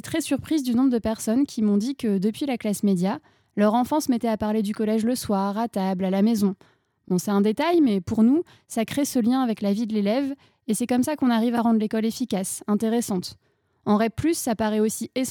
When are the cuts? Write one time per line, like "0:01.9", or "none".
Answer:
none

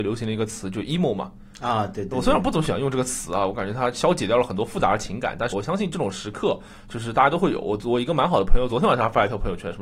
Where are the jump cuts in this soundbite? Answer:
0:05.5

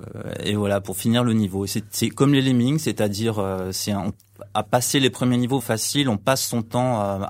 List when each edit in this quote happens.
0:05.6

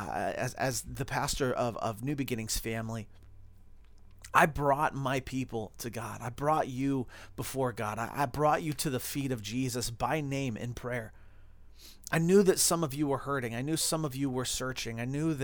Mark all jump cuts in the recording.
none

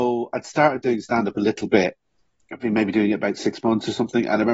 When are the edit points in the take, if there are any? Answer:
none

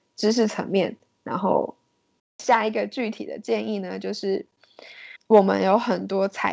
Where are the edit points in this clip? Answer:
0:02.2
0:05.2

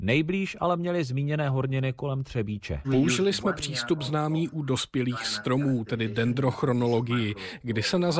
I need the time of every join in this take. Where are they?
0:02.8

